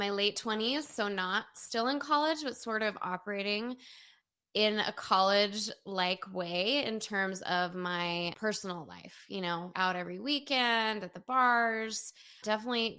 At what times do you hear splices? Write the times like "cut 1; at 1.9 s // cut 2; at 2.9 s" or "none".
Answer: cut 1; at 9.7 s